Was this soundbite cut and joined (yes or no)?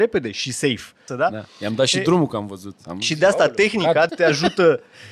yes